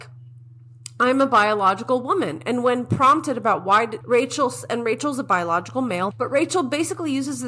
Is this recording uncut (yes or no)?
no